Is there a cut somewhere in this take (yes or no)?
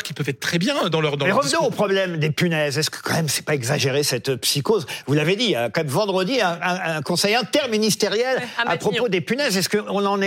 no